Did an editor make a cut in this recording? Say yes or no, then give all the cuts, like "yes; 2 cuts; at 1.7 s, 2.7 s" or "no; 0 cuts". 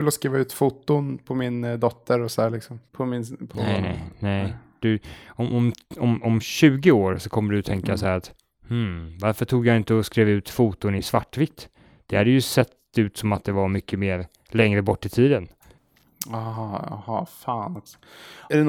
yes; 1 cut; at 2.9 s